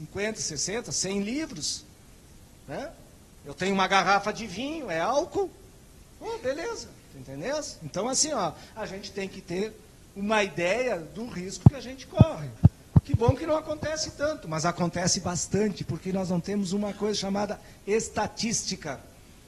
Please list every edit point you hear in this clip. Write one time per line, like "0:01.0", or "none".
none